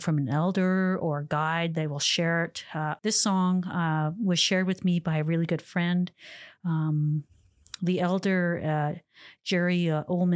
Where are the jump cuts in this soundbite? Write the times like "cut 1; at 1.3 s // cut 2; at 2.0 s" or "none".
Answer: cut 1; at 3.0 s